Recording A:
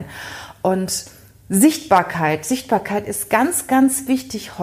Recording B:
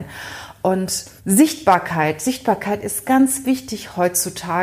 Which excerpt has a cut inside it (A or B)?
B